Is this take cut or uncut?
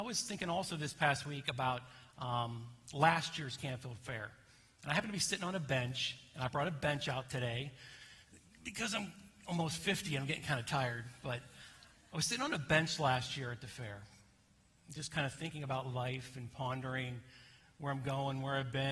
uncut